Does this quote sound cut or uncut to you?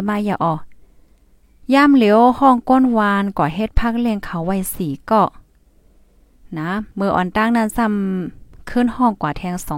cut